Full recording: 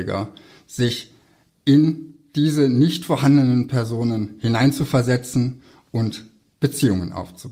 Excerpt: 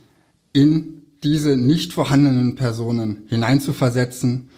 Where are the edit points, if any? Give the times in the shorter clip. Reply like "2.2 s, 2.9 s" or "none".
none

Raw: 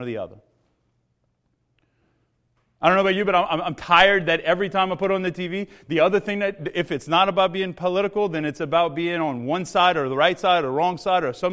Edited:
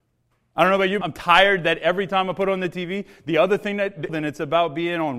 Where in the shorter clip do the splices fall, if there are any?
1.0 s, 4.1 s

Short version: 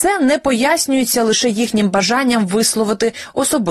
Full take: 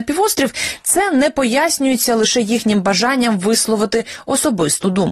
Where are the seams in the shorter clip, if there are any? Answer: none

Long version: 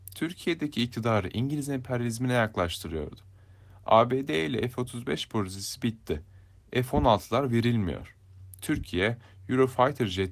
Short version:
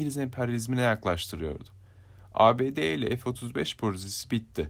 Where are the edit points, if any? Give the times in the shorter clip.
none

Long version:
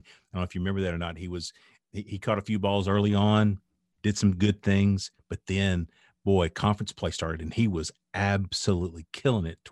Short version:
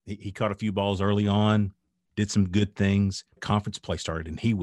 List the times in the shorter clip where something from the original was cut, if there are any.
3.4 s

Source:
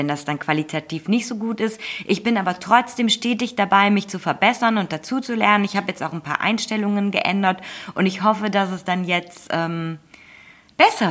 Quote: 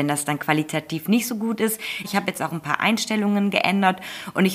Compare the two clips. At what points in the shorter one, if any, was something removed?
2.0 s

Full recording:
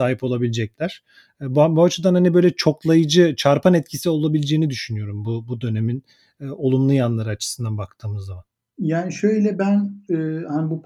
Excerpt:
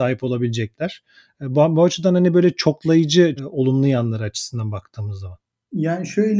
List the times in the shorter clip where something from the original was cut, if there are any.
3.4 s

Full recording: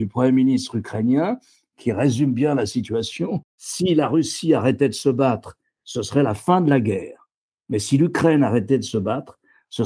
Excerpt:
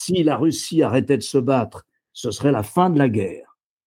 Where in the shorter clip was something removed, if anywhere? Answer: none

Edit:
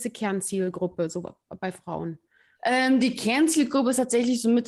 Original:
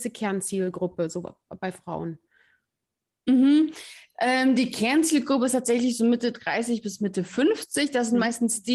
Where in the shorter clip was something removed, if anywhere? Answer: 2.6 s

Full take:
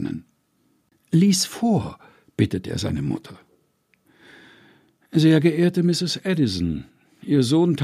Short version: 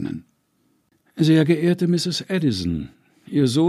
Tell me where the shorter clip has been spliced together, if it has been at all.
1.0 s

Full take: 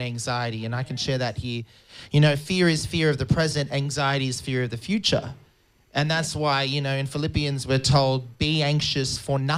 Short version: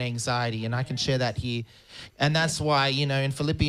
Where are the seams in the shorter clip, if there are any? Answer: 2.1 s

